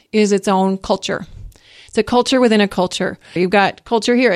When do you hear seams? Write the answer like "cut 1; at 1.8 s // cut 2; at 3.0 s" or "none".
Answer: cut 1; at 3.4 s